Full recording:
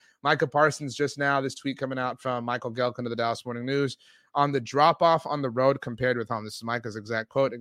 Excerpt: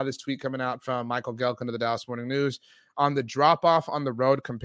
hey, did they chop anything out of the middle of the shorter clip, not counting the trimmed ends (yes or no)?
no